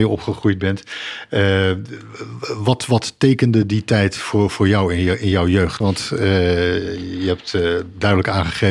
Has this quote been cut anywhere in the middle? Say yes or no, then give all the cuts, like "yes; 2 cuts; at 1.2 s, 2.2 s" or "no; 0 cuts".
yes; 1 cut; at 5.8 s